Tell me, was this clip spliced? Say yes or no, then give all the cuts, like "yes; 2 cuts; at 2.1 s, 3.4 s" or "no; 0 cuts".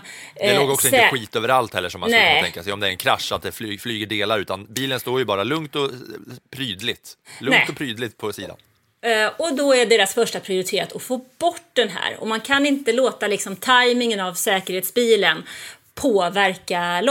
no; 0 cuts